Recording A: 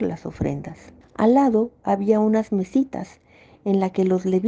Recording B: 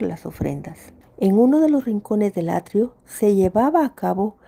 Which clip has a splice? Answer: B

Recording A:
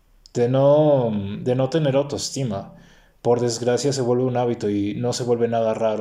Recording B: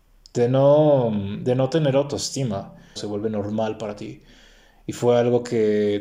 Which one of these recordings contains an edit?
B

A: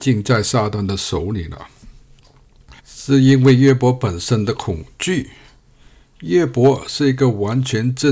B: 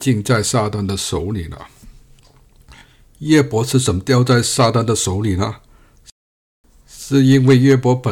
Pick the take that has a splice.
A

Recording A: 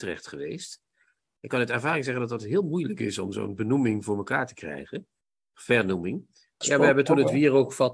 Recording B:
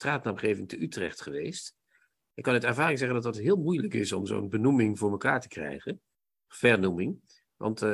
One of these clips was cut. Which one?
A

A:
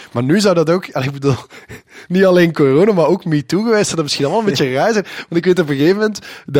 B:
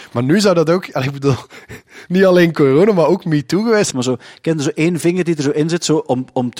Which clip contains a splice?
B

